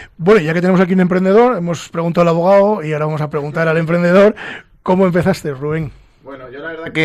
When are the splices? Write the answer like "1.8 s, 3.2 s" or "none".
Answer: none